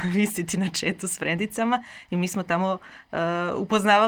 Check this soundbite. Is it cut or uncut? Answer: uncut